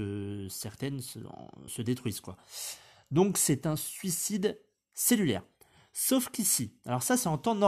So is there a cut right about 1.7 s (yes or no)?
yes